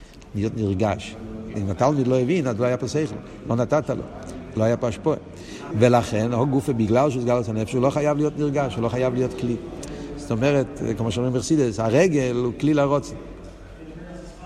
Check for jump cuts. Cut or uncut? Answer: cut